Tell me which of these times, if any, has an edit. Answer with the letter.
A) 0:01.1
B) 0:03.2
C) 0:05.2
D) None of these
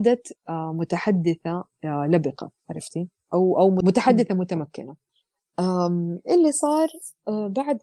D